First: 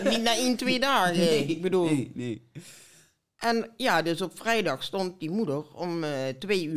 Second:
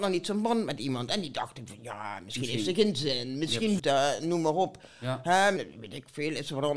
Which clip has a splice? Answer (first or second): second